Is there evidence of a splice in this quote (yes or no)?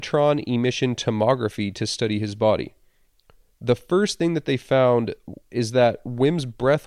no